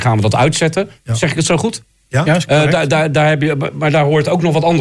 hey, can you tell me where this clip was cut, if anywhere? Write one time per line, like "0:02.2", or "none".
none